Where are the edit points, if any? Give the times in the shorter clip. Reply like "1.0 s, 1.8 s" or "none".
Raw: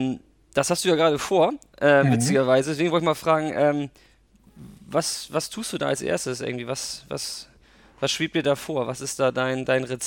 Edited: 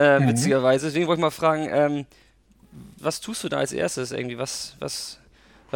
3.0 s